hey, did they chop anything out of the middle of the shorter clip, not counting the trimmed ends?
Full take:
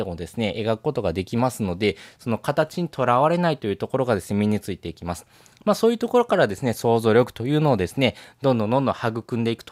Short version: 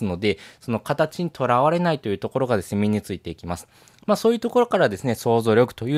no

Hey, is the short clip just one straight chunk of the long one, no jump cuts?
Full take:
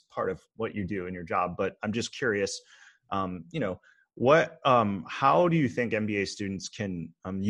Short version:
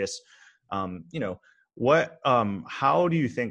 yes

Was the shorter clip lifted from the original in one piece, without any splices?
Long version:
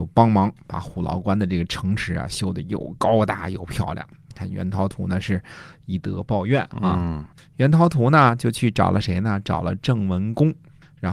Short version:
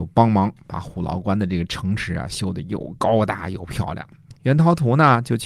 no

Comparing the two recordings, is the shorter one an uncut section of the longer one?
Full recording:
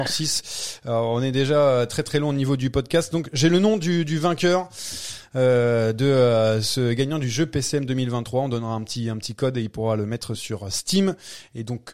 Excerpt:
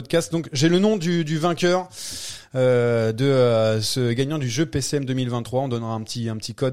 yes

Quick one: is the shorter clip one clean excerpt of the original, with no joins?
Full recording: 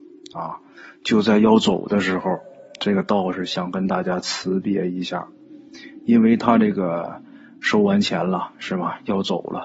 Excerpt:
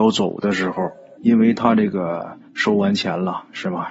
no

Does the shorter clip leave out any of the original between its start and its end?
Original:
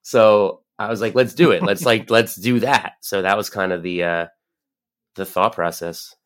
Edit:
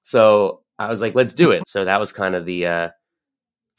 yes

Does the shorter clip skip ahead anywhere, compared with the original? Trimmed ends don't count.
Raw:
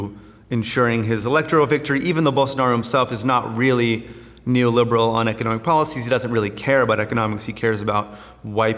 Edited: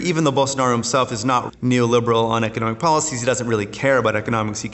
yes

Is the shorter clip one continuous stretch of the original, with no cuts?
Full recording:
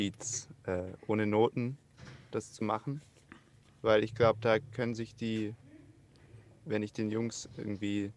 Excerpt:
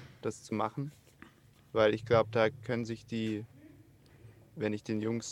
yes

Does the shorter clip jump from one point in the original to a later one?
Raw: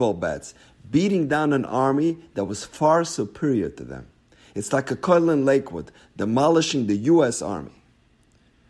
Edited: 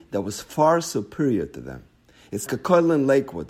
yes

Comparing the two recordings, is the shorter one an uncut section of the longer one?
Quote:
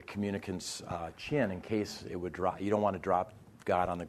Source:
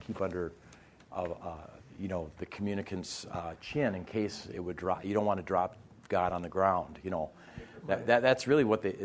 yes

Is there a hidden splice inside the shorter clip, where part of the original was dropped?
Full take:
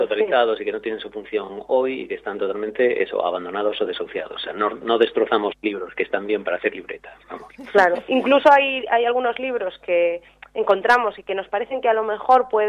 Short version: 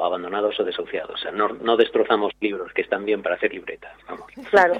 no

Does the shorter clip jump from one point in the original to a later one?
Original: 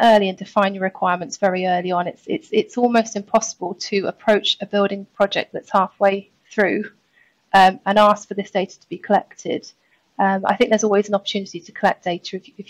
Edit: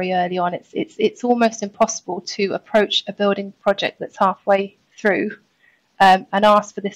no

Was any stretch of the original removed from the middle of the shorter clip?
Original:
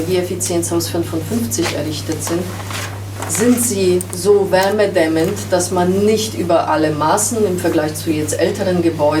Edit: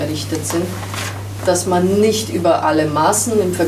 yes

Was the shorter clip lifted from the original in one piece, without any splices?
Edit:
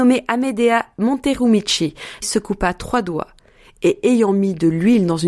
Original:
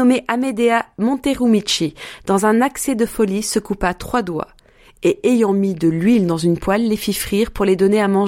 no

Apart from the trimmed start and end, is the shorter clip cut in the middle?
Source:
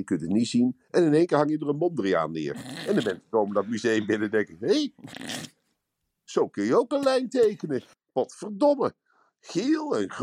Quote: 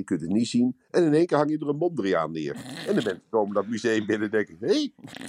no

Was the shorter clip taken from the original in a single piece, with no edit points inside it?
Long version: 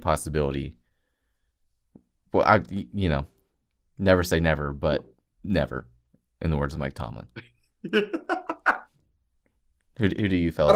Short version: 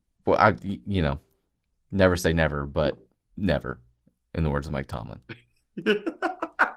yes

